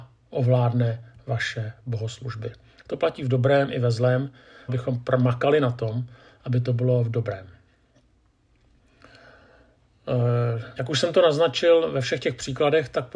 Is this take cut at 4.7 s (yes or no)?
yes